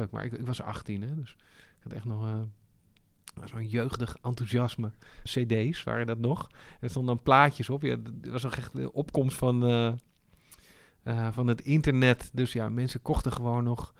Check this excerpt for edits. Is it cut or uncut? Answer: cut